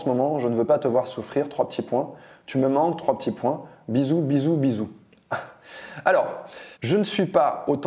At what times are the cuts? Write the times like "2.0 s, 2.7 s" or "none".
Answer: 6.7 s